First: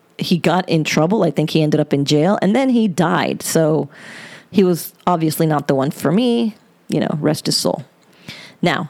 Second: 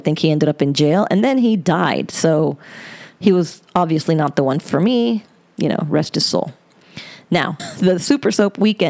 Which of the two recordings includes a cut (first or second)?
second